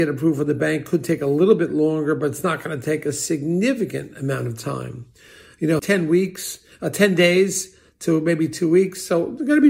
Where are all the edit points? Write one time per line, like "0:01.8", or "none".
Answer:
0:05.8